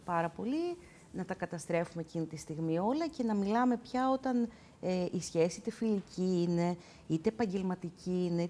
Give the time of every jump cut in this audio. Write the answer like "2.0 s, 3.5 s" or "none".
none